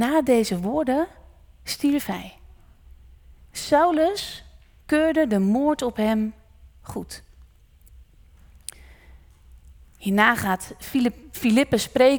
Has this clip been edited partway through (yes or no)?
no